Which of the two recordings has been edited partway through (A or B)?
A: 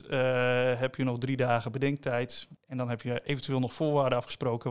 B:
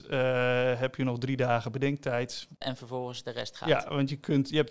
B